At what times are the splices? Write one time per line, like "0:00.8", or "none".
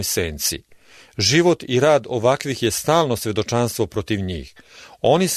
none